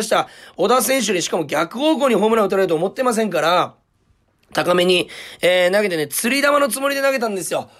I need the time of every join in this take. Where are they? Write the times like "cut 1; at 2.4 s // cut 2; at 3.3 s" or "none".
none